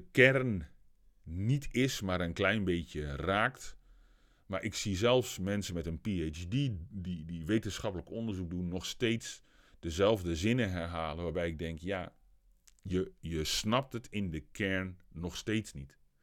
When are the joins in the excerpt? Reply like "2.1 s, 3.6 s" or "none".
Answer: none